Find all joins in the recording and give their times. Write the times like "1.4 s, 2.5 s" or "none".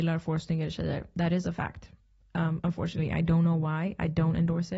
none